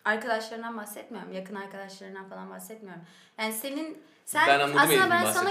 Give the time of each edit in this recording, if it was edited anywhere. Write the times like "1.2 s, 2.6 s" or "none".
none